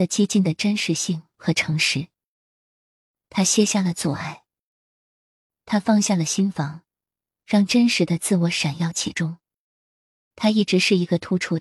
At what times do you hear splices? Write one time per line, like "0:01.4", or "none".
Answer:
0:03.3
0:10.3